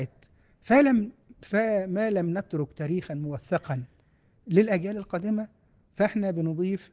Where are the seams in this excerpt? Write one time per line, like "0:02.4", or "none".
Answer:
none

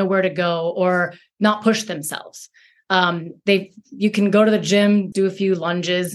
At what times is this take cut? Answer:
0:05.1

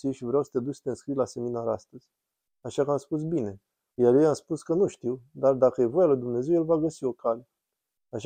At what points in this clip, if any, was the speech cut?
0:04.0

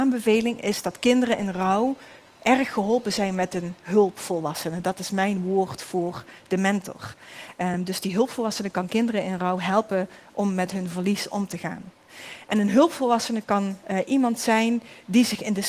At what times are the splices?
none

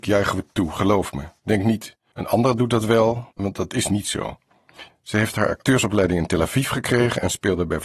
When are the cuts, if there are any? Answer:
0:03.4
0:04.9

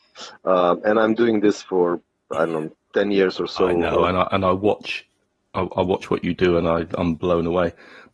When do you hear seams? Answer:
none

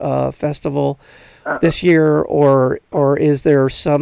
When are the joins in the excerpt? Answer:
0:02.8

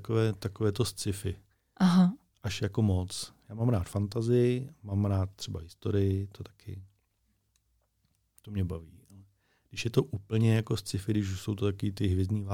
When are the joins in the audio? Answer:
none

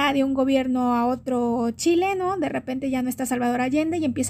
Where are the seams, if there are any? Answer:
none

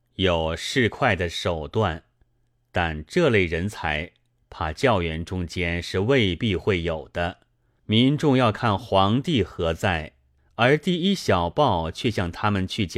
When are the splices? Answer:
0:07.8
0:10.4

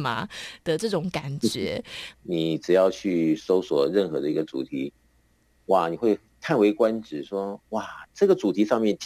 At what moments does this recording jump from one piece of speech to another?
0:02.1

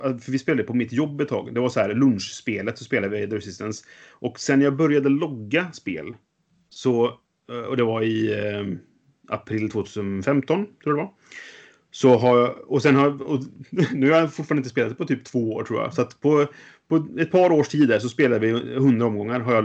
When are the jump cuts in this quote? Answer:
none

